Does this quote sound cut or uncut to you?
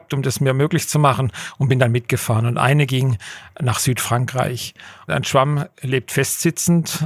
cut